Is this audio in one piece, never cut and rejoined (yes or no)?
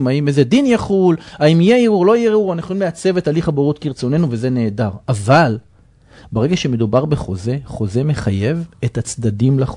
yes